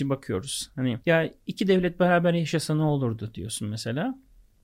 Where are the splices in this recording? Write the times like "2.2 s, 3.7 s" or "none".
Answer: 1.0 s